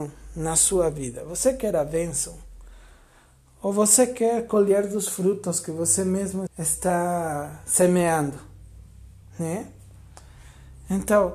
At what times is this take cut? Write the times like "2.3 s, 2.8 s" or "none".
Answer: 6.5 s